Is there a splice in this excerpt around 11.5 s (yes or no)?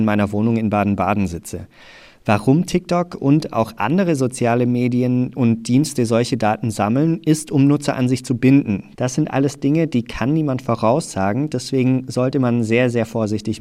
no